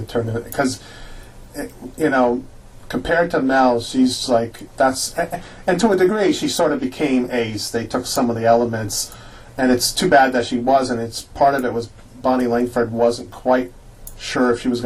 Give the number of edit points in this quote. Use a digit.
1